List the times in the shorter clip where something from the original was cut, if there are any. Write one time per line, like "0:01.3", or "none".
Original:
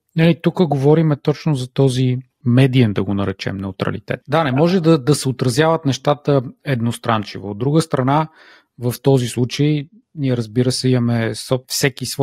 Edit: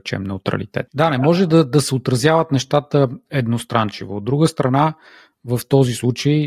none